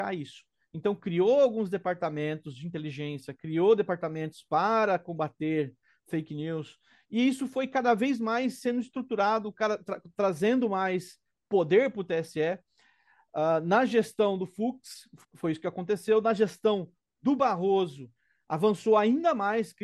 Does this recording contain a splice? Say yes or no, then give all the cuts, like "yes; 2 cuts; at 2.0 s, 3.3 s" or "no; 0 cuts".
yes; 1 cut; at 15.2 s